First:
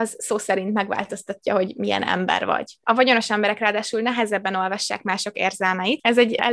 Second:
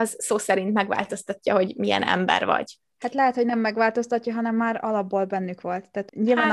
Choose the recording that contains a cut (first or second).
first